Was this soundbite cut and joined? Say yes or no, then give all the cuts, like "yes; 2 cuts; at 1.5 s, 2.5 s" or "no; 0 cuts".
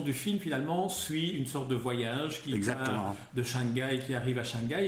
no; 0 cuts